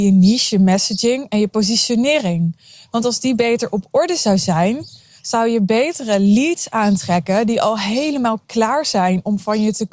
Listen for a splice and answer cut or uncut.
uncut